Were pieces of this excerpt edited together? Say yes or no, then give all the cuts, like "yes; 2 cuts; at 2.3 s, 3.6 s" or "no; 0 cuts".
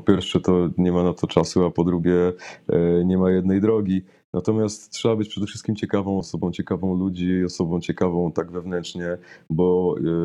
yes; 1 cut; at 6.2 s